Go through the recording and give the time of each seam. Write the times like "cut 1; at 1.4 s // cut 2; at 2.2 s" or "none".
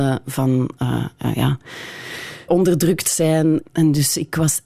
cut 1; at 2.5 s // cut 2; at 3.6 s